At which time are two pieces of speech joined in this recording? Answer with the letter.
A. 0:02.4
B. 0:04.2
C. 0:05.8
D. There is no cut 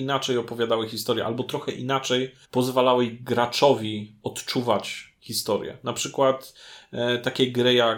A